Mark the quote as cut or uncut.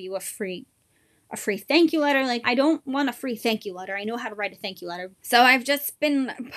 cut